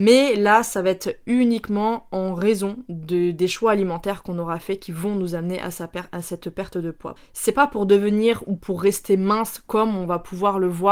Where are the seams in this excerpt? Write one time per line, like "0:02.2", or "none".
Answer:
0:07.2

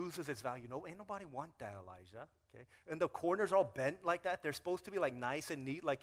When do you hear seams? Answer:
none

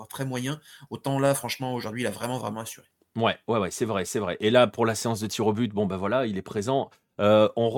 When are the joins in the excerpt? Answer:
none

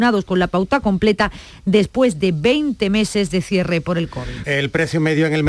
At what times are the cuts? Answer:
0:04.4

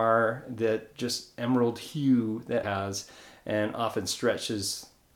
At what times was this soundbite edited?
0:02.6

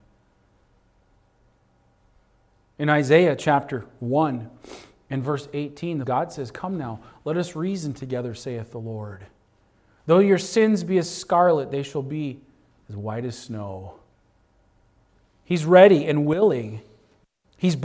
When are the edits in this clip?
0:06.0

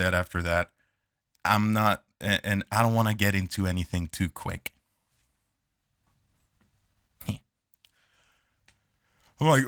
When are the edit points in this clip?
none

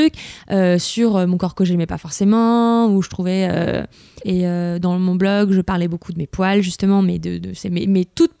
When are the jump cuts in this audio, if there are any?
0:04.2

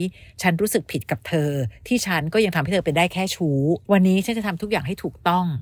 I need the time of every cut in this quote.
0:03.8

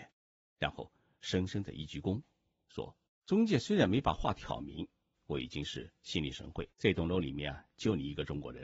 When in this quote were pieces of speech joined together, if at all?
0:03.1
0:05.1
0:06.7

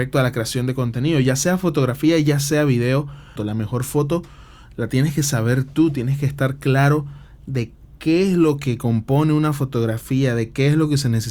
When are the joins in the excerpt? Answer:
0:03.4

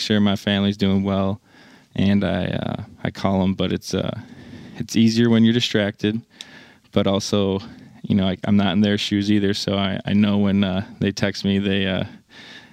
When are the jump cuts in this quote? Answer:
none

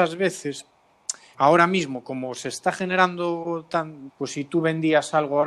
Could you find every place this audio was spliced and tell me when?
0:01.3
0:04.1

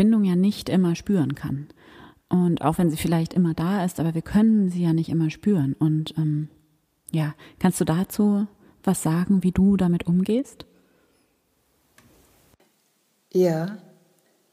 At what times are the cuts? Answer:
none

